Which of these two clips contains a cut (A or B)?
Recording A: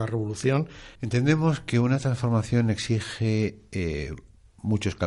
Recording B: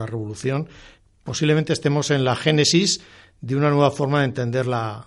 A